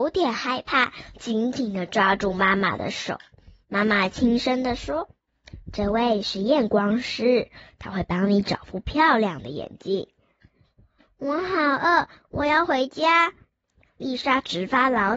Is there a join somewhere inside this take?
no; 0 cuts

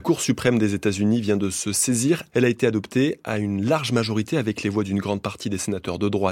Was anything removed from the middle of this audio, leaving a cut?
yes; 1 cut; at 2.3 s

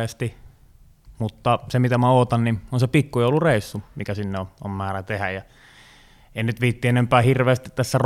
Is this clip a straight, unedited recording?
yes; 0 cuts

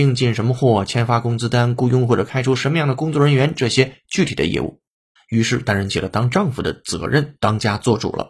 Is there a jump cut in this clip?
yes; 1 cut; at 5.2 s

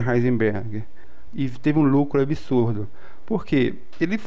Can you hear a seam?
yes; 1 cut; at 1.3 s

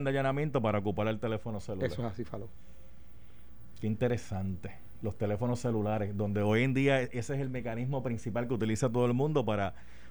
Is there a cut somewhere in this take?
no; 0 cuts

